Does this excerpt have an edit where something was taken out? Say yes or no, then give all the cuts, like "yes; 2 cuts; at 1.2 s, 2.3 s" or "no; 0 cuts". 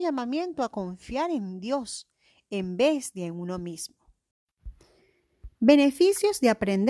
no; 0 cuts